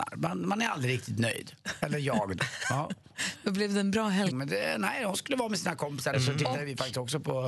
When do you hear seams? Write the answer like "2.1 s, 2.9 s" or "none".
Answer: 4.3 s, 6.1 s